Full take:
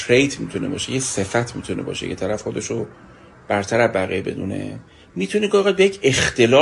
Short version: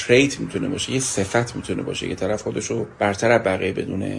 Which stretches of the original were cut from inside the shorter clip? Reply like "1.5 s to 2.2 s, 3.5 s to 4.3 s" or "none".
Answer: 2.9 s to 3.4 s